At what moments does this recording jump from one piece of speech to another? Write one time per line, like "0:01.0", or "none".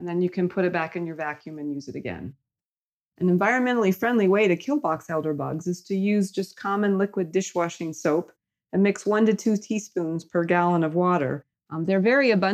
0:11.5